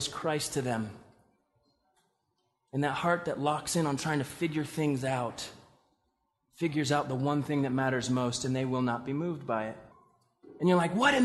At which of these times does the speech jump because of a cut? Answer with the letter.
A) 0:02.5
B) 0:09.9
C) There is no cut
B